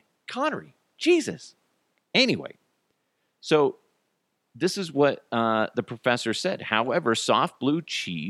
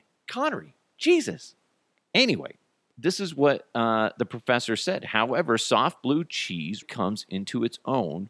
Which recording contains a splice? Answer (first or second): second